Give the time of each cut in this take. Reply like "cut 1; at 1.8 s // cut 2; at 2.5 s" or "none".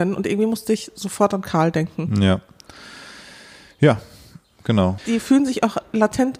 cut 1; at 5.0 s